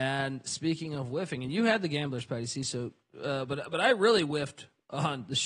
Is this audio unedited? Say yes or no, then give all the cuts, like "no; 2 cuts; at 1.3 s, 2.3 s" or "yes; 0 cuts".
yes; 0 cuts